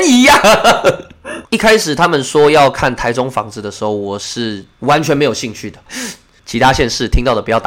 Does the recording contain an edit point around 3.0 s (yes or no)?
no